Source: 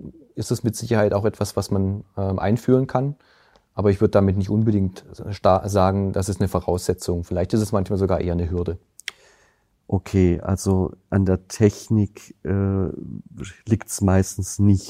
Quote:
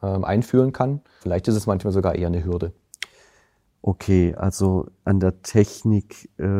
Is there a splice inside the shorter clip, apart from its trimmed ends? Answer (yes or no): yes